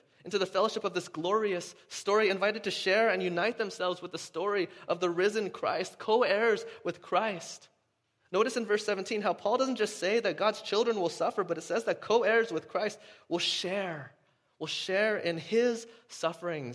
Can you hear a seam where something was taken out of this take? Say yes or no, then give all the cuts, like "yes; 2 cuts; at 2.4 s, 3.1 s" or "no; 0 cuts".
no; 0 cuts